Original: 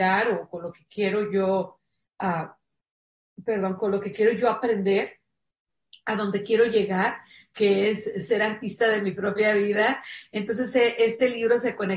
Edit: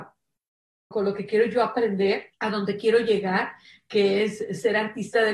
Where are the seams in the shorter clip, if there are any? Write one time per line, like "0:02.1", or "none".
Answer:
0:00.9
0:02.3